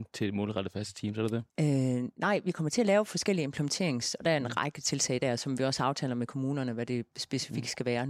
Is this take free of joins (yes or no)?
no